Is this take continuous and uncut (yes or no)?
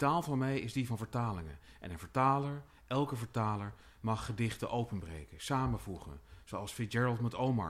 yes